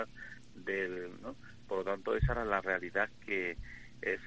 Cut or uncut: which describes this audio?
cut